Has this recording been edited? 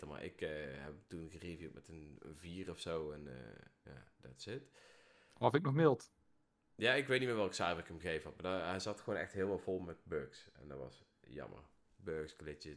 no; 0 cuts

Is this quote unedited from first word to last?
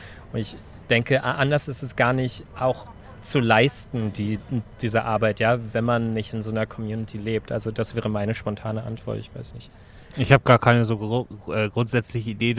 yes; 0 cuts

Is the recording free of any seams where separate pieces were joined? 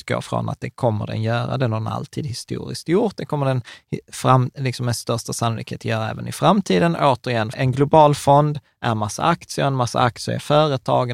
no; 1 cut; at 7.5 s

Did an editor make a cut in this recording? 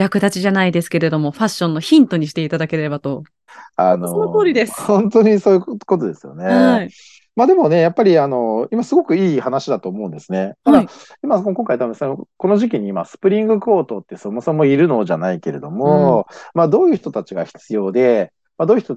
yes; 1 cut; at 3.5 s

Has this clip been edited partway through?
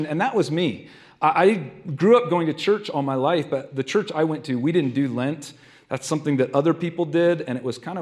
no; 0 cuts

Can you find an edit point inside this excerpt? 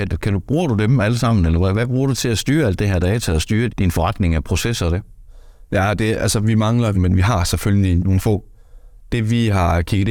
yes; 3 cuts; at 3.7 s, 6.9 s, 8.0 s

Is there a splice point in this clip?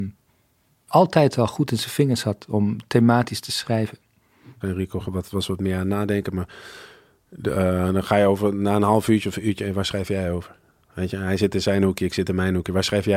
yes; 1 cut; at 4.6 s

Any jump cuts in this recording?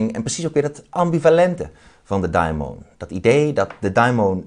no; 0 cuts

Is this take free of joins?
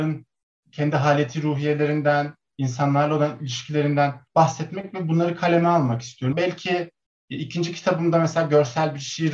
no; 2 cuts; at 4.3 s, 6.3 s

